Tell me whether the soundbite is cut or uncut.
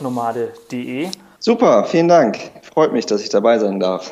cut